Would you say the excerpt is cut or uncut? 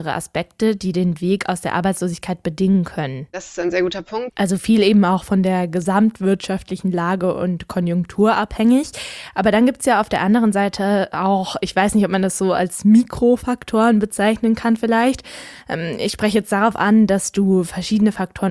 cut